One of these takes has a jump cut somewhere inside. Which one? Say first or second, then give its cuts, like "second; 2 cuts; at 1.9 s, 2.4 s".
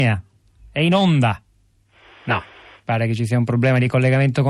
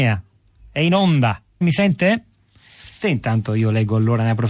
second; 2 cuts; at 1.6 s, 3.0 s